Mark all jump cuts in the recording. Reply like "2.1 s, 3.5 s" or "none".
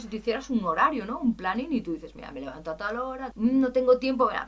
2.1 s, 3.3 s